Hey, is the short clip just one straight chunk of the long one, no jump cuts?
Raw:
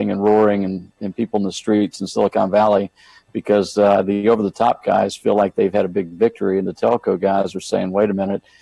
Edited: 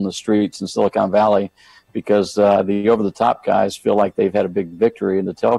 yes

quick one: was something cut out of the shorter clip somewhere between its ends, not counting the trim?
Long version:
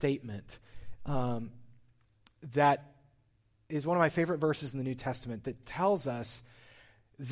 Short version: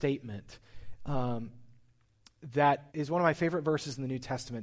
yes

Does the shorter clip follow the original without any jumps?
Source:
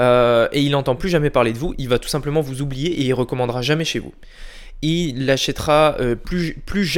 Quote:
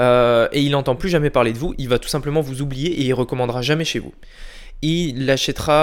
yes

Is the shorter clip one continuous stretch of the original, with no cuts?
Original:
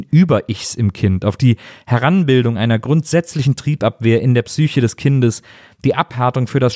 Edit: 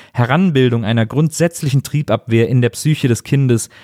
yes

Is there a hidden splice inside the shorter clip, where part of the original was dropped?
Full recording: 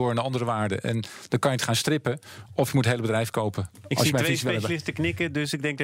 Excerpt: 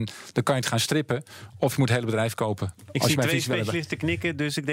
no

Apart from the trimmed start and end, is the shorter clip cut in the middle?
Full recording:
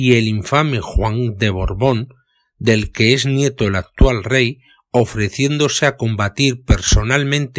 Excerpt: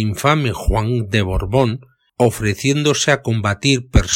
yes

